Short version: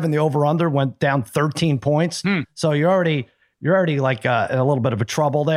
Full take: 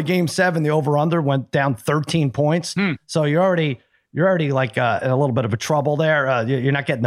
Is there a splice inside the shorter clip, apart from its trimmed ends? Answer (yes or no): no